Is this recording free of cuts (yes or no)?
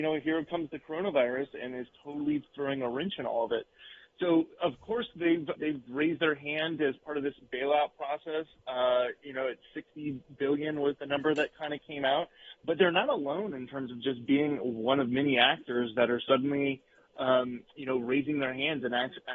no